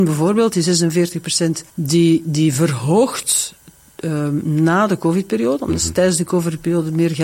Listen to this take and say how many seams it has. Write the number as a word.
zero